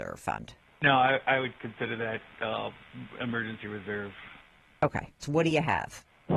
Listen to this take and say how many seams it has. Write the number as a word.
one